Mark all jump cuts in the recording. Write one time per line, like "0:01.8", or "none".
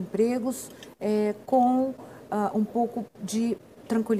none